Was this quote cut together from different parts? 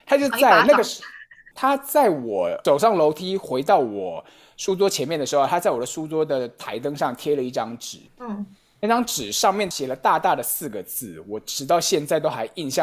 yes; 1 cut; at 8.1 s

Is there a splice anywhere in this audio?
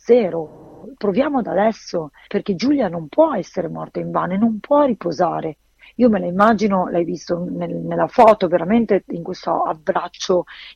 no; 0 cuts

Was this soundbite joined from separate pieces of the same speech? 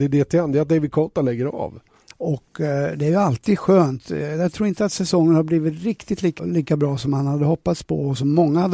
yes; 2 cuts; at 2.1 s, 6.4 s

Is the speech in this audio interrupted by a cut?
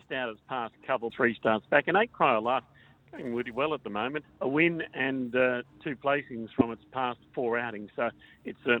yes; 2 cuts; at 1.1 s, 4.2 s

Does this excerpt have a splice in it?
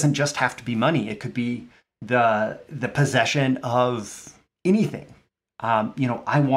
no; 0 cuts

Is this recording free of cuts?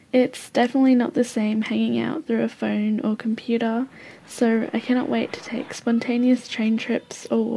yes; 0 cuts

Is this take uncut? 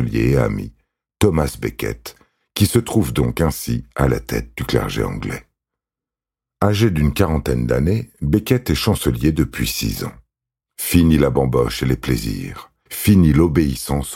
no; 2 cuts; at 10.7 s, 12.9 s

